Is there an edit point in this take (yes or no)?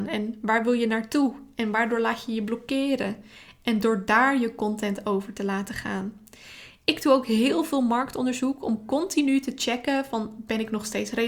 no